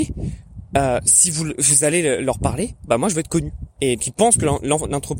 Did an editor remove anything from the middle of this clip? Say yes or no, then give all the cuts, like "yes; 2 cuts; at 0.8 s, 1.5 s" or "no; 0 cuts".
yes; 2 cuts; at 2.9 s, 4.0 s